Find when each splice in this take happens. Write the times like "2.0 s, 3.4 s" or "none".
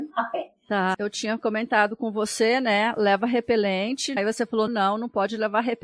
0.9 s, 4.7 s

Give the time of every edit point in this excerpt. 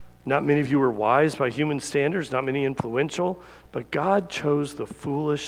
3.7 s

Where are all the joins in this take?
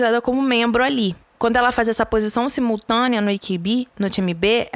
none

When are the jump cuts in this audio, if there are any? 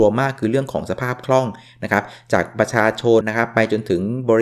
3.2 s

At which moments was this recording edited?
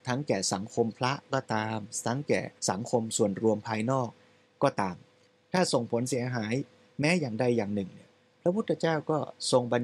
2.6 s

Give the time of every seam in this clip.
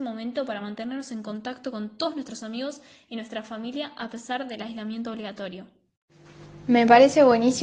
none

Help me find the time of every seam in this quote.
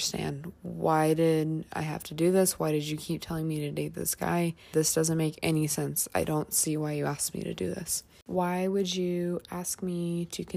4.7 s

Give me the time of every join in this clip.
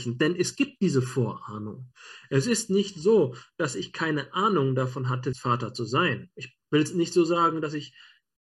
5.3 s, 6.6 s

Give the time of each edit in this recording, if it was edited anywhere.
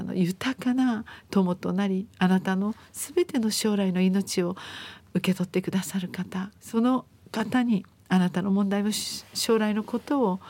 6.6 s

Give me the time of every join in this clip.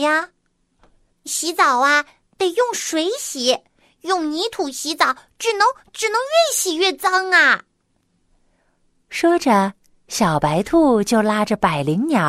1.1 s

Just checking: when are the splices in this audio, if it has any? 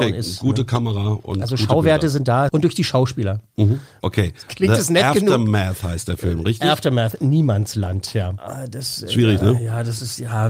2.5 s, 4.0 s, 8.4 s

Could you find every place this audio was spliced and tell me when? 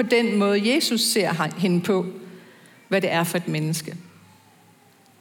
2.9 s

